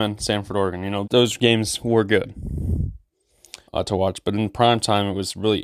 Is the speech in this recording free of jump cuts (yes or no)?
no